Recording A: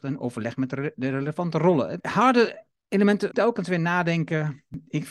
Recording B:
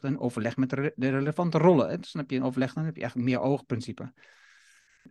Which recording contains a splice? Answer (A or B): A